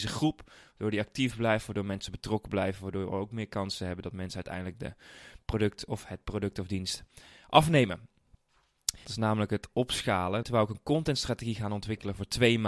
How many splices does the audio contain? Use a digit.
2